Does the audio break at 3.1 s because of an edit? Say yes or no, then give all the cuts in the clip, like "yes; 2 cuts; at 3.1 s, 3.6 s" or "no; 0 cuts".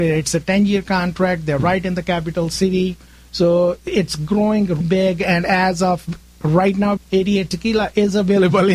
no; 2 cuts; at 4.8 s, 7.0 s